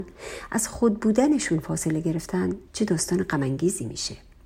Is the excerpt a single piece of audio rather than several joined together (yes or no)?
no